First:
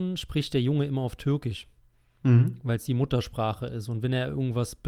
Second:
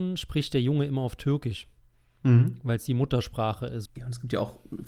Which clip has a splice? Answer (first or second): second